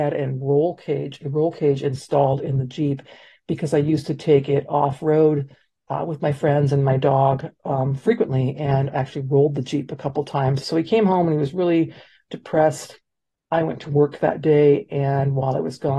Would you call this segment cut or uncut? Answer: cut